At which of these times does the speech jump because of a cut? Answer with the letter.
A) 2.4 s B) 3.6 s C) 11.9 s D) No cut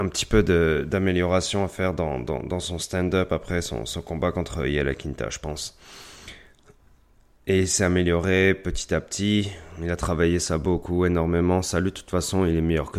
D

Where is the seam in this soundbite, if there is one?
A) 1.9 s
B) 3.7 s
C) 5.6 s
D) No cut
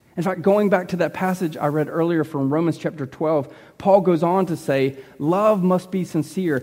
D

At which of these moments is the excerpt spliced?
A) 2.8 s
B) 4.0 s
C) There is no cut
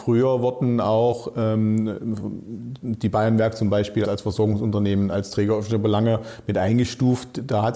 B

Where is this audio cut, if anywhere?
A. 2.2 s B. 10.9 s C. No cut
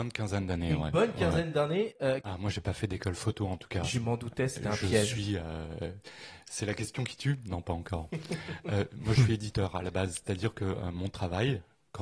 A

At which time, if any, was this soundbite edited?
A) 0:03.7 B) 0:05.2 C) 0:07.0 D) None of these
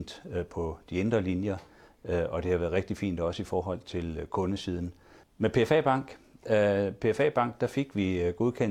B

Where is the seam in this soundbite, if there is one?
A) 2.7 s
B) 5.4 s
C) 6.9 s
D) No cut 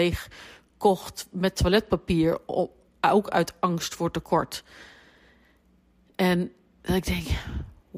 D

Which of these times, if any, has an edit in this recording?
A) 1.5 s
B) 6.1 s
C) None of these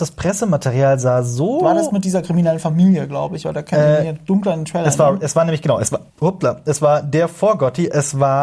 B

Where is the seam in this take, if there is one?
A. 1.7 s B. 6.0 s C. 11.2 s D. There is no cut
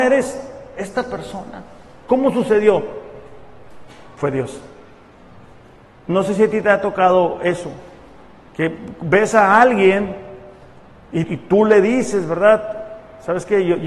C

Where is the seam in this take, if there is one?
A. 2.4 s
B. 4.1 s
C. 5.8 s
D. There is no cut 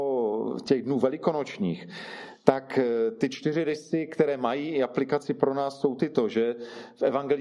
D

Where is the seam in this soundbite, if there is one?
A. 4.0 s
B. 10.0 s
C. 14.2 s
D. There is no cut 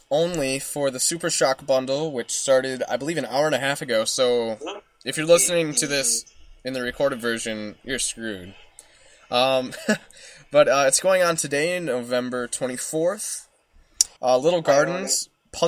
C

